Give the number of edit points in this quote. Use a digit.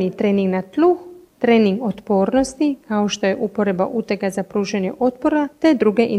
1